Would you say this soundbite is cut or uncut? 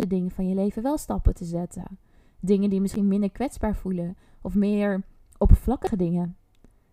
uncut